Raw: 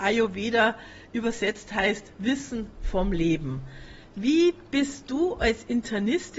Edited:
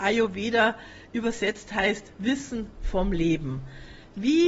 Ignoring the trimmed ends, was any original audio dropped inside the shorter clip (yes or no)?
no